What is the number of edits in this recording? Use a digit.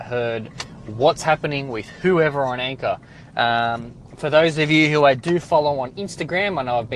0